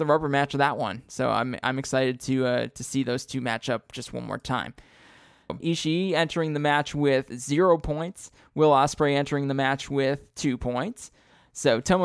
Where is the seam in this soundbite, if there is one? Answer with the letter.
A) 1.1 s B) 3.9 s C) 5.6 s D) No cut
C